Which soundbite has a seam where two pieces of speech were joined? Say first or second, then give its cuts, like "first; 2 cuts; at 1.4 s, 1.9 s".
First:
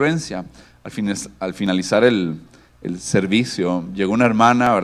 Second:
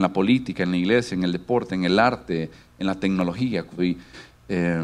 second; 1 cut; at 3.8 s